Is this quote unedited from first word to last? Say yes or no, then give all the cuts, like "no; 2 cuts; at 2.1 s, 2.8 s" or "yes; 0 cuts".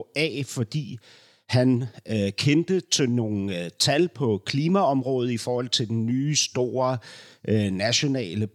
yes; 0 cuts